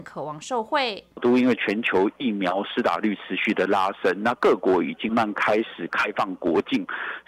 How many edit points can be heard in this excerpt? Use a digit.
1